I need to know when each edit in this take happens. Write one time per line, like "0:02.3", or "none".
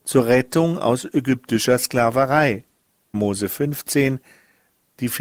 0:03.1

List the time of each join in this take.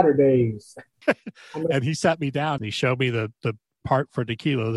0:01.0
0:02.6

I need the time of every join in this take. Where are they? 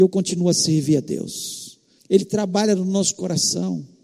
0:02.0

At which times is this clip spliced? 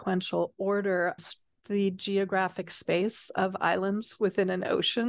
0:01.2

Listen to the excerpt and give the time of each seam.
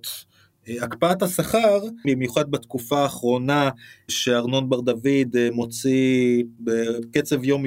0:02.0

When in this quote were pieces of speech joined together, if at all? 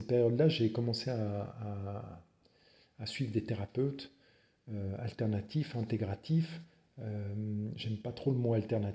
none

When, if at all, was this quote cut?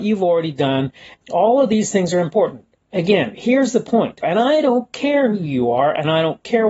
0:01.2
0:04.2

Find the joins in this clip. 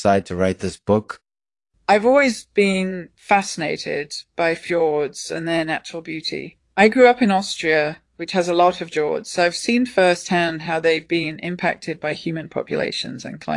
none

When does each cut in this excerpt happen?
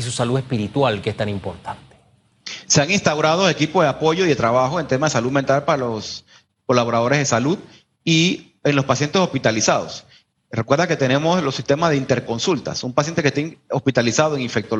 none

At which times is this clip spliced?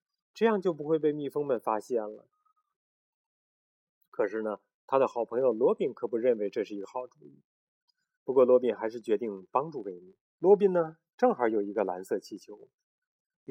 0:10.3

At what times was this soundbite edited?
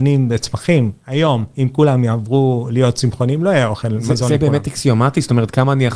none

